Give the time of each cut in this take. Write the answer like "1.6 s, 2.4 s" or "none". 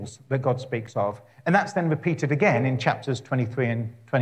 none

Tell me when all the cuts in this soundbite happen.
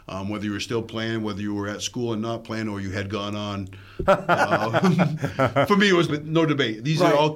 4.1 s, 6.1 s

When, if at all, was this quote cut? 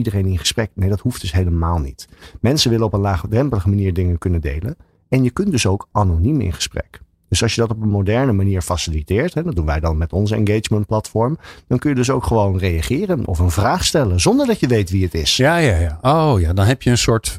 none

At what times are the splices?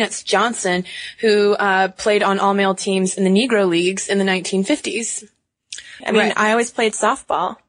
6.0 s

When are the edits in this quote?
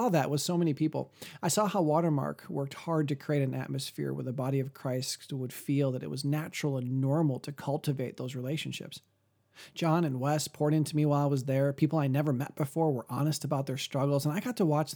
none

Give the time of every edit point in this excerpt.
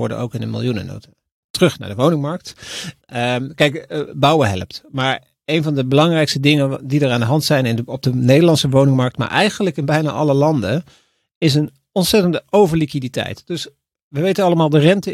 3.0 s

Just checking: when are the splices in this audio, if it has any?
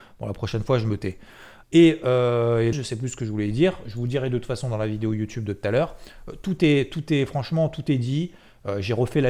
1.6 s, 2.7 s

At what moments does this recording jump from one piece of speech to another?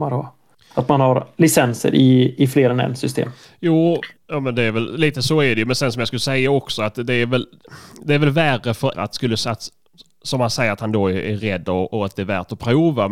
8.9 s

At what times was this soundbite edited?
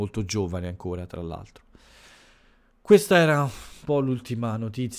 none

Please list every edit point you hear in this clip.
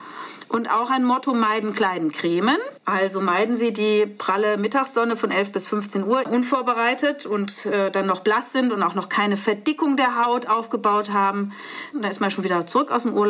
6.2 s, 11.9 s

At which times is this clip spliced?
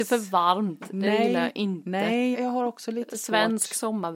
2.3 s

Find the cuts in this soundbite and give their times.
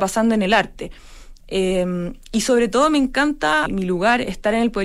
1.4 s, 3.7 s

